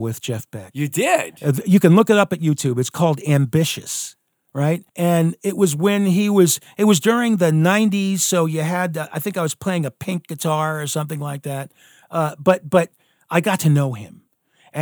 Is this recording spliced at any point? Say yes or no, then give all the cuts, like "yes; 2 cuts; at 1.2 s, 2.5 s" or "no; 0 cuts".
yes; 1 cut; at 4.9 s